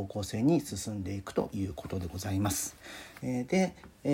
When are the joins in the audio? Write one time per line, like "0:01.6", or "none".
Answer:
0:03.2